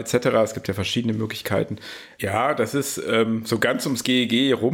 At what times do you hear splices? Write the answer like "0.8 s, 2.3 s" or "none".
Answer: 2.2 s